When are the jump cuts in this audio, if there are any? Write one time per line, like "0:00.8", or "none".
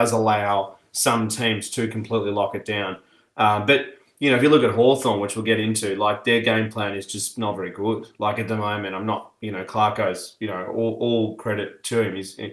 none